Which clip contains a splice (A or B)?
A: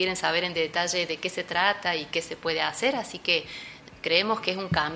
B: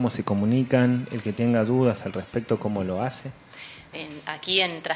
B